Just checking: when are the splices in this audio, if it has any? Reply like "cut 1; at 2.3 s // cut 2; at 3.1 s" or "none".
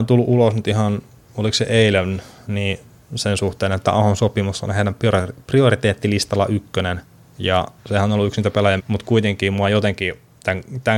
cut 1; at 7.8 s // cut 2; at 8.8 s

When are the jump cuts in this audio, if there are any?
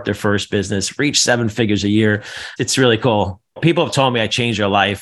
none

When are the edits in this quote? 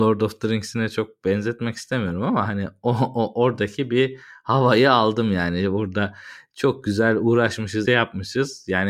cut 1; at 7.8 s

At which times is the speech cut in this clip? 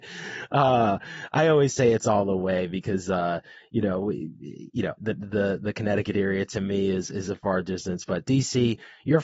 cut 1; at 5.0 s

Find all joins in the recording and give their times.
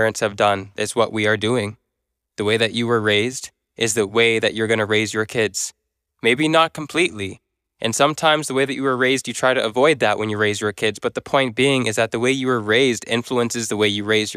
none

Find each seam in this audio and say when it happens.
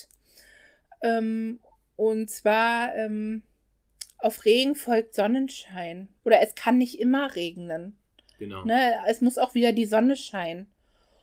cut 1; at 6.2 s

